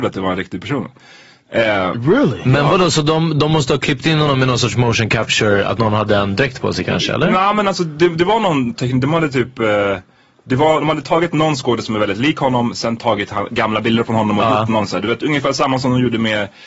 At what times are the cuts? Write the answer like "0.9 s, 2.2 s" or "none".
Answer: none